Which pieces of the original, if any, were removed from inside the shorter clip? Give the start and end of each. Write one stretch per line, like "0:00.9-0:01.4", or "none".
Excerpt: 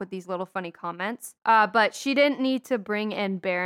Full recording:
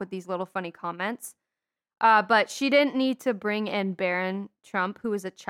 0:01.4-0:01.9